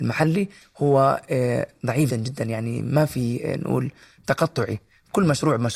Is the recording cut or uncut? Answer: cut